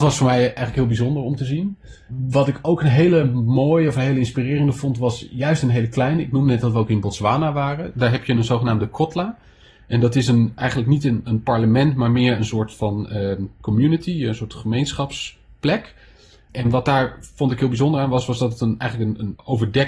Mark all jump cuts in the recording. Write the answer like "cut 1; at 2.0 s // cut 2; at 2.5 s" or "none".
none

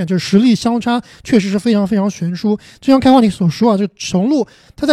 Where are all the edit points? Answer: none

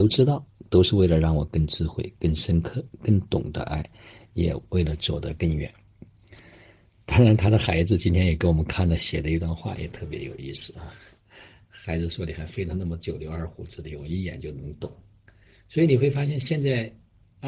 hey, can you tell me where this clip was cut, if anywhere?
none

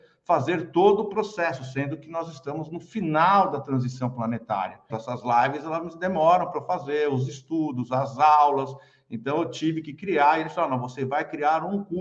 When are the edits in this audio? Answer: cut 1; at 4.9 s

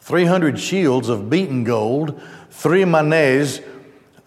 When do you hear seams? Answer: none

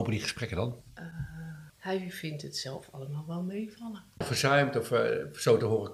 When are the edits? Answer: cut 1; at 1.7 s // cut 2; at 4.2 s

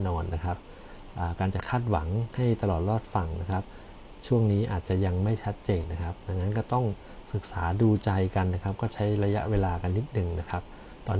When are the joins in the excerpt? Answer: cut 1; at 5.8 s

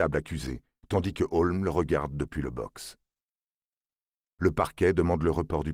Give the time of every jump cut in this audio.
none

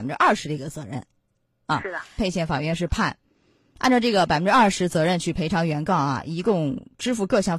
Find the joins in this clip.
cut 1; at 2.2 s

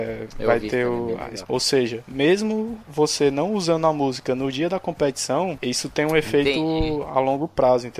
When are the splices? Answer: cut 1; at 1.5 s // cut 2; at 5.6 s

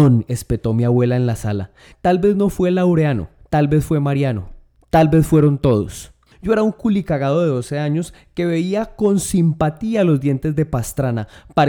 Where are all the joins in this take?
cut 1; at 1.9 s // cut 2; at 6.3 s

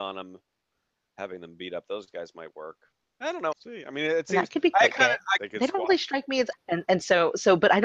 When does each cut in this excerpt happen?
cut 1; at 3.5 s // cut 2; at 5.4 s // cut 3; at 6.5 s

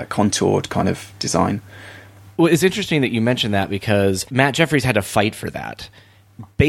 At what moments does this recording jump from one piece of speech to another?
cut 1; at 4.3 s

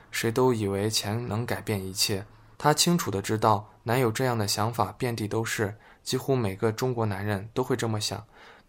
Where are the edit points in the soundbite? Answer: cut 1; at 2.5 s

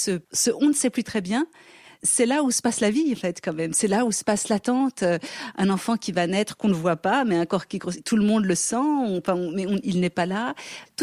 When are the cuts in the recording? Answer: none

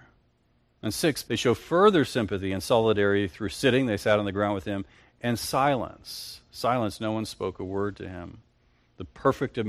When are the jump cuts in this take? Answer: cut 1; at 1.2 s

